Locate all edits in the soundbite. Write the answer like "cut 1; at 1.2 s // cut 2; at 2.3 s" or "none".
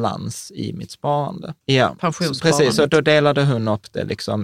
cut 1; at 1.6 s

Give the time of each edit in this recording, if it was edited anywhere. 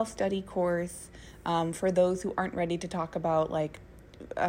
none

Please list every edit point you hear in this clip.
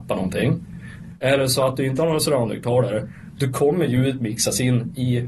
none

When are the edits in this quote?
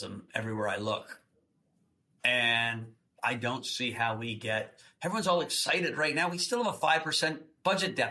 none

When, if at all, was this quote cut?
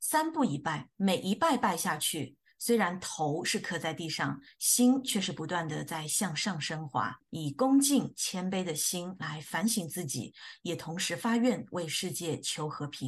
none

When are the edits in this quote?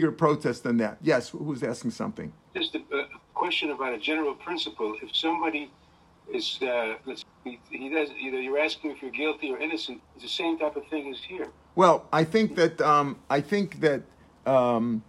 cut 1; at 7.2 s // cut 2; at 10.0 s

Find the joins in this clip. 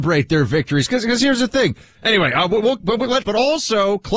cut 1; at 1.9 s // cut 2; at 3.2 s

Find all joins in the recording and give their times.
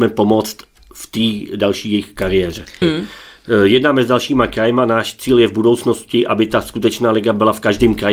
cut 1; at 2.8 s

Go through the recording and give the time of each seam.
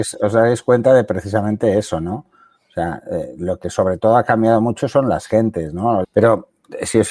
cut 1; at 6.0 s

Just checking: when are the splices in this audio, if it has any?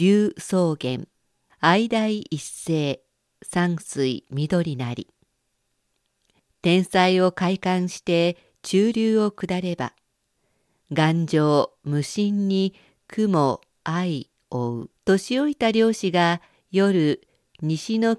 cut 1; at 1.5 s // cut 2; at 15.0 s

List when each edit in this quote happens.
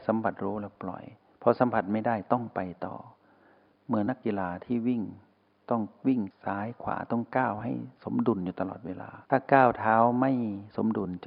cut 1; at 4.1 s // cut 2; at 9.2 s

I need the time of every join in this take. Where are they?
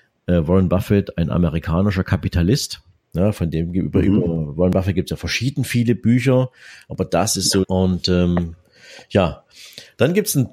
cut 1; at 7.6 s

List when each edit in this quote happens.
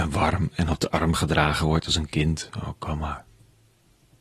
none

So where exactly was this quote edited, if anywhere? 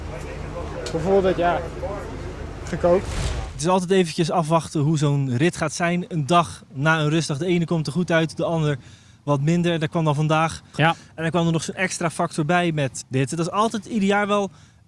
cut 1; at 10.7 s // cut 2; at 13.0 s

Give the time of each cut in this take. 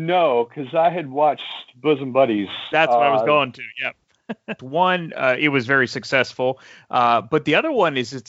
cut 1; at 4.6 s

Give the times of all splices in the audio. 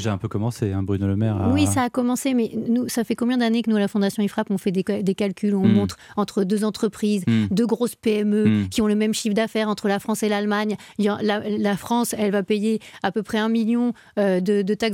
none

